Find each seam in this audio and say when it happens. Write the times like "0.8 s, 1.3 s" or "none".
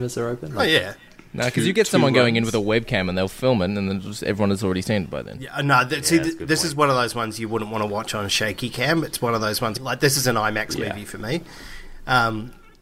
9.8 s